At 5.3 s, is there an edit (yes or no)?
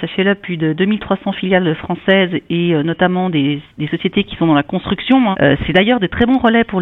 yes